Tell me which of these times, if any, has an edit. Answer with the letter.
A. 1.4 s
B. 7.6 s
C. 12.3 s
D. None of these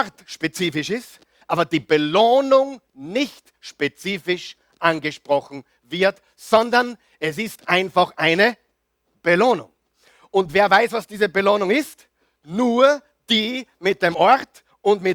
A